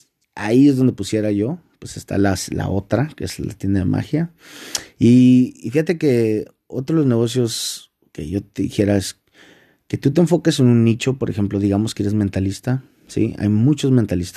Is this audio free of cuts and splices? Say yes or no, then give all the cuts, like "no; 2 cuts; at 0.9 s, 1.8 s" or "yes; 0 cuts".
yes; 0 cuts